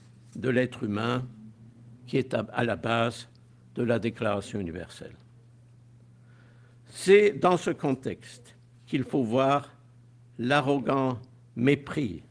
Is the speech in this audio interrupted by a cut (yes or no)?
no